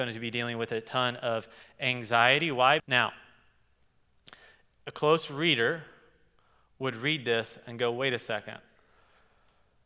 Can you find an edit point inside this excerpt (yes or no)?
yes